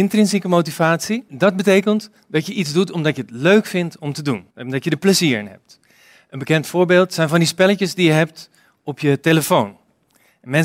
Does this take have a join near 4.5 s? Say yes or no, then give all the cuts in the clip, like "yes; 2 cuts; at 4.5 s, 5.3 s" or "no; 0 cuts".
yes; 1 cut; at 4.5 s